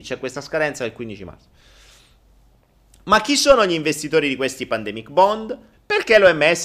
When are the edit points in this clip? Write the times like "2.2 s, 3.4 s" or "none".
5.7 s

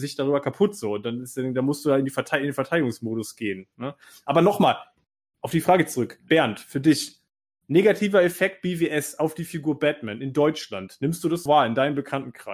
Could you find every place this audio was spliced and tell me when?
6.3 s, 11.5 s

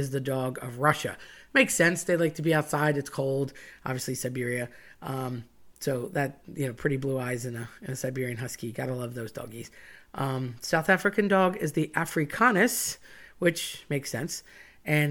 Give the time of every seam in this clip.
none

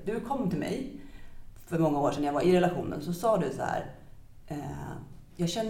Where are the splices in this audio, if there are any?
none

